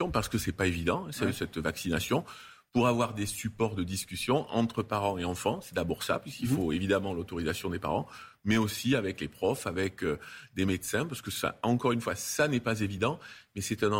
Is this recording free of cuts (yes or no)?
yes